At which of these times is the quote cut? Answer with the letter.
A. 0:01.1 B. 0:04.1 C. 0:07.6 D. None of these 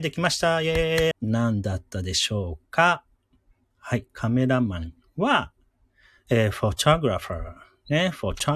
A